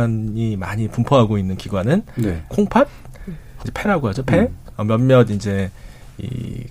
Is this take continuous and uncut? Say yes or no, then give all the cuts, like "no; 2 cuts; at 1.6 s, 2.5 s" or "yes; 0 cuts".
no; 2 cuts; at 3.6 s, 4.7 s